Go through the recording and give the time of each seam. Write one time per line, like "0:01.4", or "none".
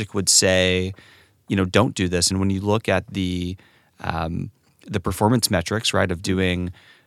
none